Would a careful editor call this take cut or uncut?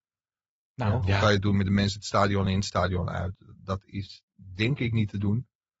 cut